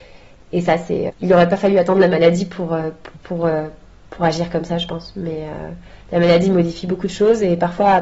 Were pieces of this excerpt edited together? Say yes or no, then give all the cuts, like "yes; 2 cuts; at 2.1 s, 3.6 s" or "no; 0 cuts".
yes; 1 cut; at 1.1 s